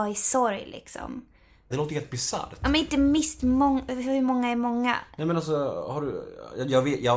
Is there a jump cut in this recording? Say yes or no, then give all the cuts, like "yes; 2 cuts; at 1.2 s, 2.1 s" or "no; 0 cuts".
yes; 1 cut; at 1.7 s